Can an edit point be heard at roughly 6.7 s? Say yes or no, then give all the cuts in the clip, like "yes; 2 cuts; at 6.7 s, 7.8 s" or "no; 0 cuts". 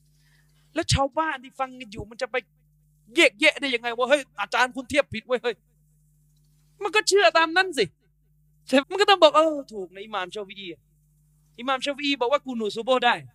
no; 1 cut; at 8.8 s